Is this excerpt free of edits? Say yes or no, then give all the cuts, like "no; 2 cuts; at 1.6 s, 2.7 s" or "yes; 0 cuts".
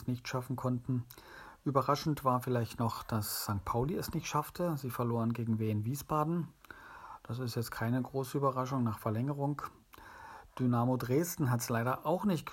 yes; 0 cuts